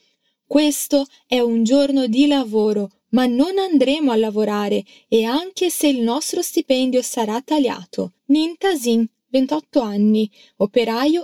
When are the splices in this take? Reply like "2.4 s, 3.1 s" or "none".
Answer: 8.2 s